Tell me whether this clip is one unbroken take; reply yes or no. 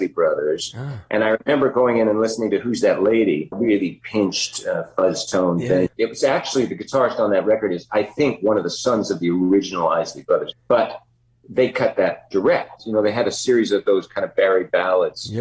no